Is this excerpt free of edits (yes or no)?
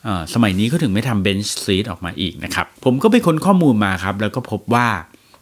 no